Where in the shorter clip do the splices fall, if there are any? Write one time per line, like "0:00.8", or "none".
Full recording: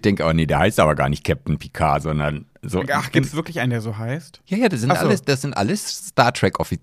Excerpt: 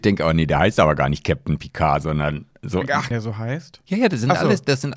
0:03.1

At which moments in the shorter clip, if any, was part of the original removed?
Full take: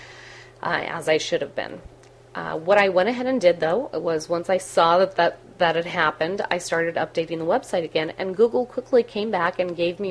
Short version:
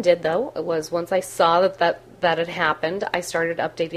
none

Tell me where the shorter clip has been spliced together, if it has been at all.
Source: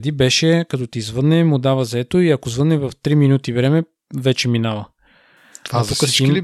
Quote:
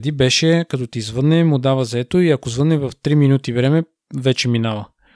none

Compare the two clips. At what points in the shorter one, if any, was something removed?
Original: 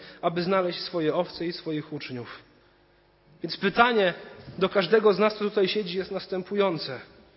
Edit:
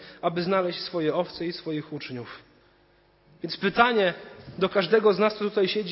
none

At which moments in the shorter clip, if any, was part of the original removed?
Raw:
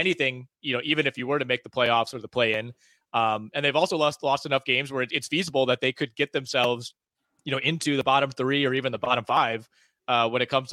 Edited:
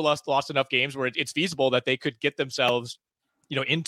none

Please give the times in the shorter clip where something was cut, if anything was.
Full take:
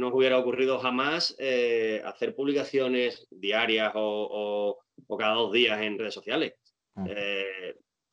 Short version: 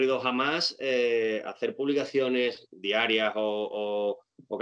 none

